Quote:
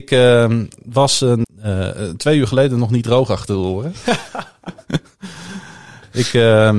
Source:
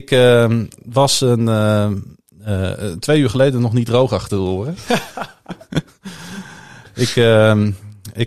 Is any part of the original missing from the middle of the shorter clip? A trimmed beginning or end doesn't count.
yes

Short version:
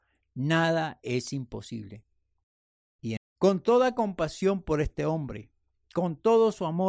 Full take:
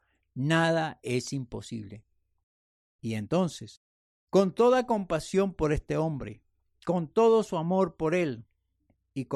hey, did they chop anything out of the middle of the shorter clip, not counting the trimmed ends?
yes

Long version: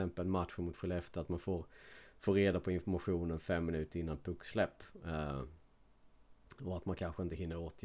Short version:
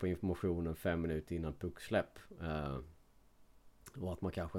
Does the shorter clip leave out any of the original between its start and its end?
no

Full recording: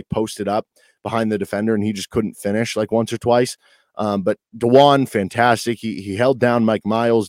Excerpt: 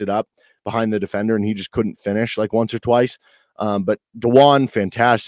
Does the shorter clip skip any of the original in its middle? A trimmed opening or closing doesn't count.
no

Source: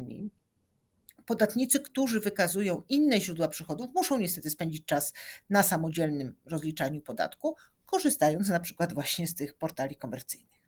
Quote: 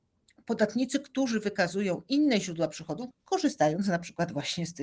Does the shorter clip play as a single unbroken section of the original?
no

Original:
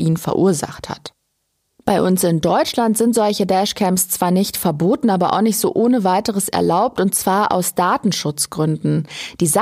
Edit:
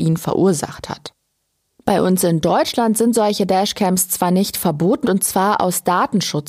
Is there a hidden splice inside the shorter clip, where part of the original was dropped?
yes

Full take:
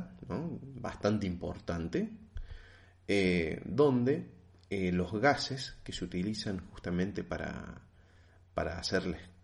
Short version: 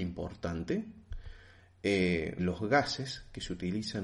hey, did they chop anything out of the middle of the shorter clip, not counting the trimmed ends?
yes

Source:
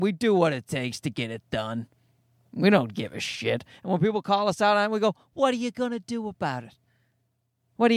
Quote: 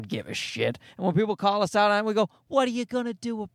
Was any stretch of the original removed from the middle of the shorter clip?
no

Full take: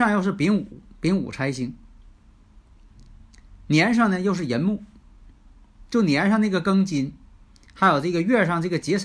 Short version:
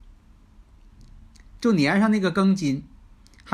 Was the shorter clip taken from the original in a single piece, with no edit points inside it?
no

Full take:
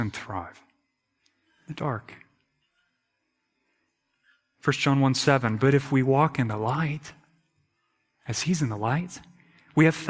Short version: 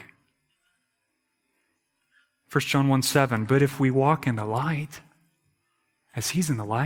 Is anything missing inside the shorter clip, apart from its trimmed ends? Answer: no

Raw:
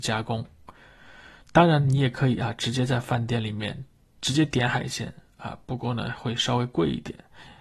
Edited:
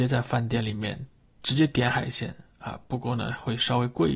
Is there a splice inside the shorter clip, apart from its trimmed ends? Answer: no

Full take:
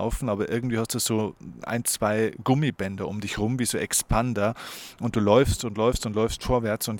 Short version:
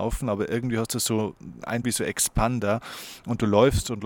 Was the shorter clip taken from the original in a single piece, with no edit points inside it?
no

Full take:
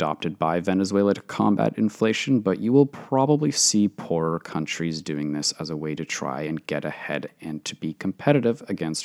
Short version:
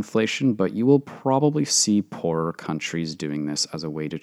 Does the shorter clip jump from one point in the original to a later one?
no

